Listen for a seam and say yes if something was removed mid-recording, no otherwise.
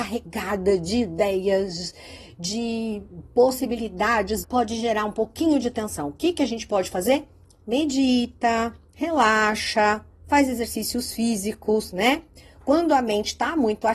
yes